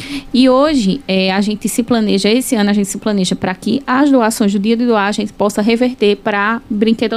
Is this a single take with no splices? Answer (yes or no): yes